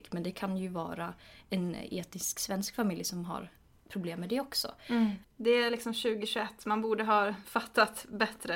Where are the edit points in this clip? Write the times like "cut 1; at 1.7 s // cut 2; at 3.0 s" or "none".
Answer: cut 1; at 5.2 s